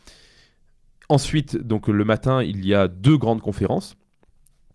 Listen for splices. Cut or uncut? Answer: uncut